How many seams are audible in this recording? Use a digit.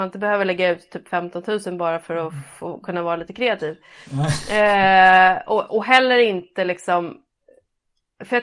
0